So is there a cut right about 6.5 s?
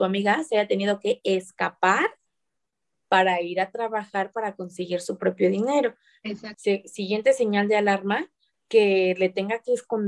yes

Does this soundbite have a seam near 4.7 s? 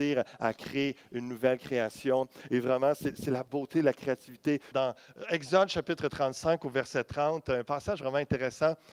yes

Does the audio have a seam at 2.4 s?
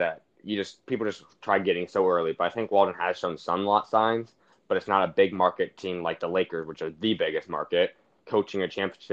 no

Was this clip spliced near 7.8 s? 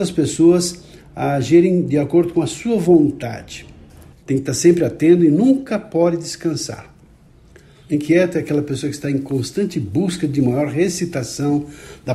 yes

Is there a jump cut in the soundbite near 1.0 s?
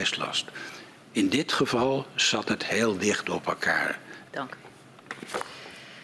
no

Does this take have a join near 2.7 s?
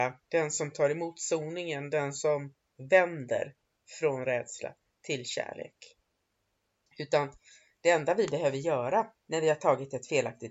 no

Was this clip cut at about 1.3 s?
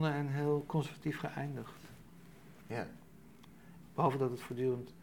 no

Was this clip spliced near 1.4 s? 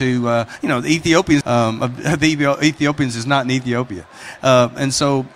yes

